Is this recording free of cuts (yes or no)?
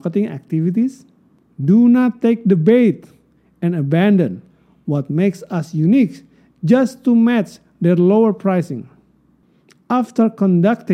no